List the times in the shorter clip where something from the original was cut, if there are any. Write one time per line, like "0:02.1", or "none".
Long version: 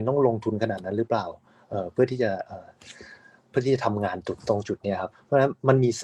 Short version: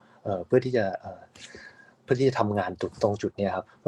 none